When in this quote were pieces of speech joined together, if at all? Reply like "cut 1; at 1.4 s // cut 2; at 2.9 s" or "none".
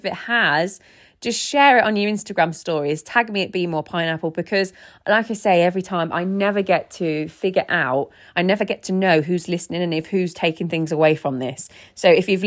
none